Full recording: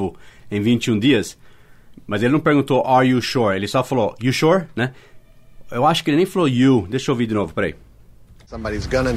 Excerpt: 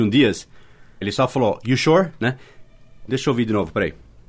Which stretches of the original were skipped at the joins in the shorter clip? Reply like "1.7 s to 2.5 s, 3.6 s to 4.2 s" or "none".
1.9 s to 3.6 s, 5.6 s to 6.9 s